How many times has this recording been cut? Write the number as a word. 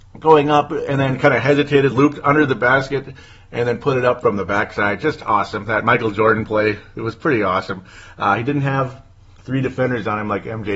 zero